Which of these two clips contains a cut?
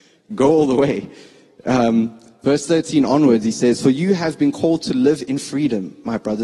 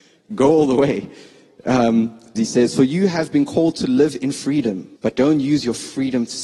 second; 2 cuts; at 2.3 s, 5.0 s

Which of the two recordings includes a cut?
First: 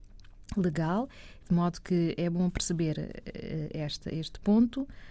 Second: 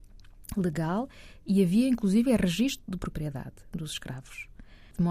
first; 1 cut; at 1.4 s

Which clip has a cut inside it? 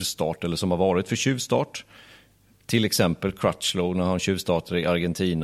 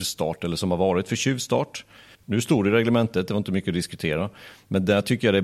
second; 1 cut; at 2.1 s

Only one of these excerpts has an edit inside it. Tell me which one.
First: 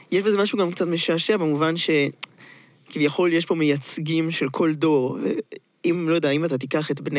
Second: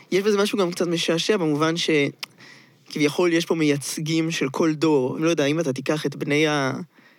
second; 1 cut; at 5.2 s

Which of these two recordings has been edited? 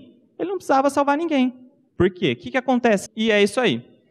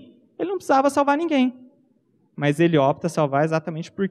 first; 2 cuts; at 1.9 s, 3.1 s

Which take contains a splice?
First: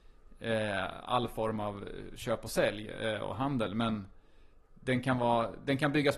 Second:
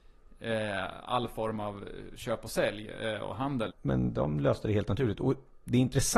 second; 1 cut; at 3.7 s

